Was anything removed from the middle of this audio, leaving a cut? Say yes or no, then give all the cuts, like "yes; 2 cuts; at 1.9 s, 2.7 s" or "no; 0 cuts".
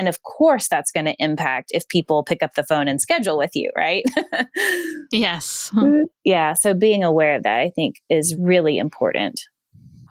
no; 0 cuts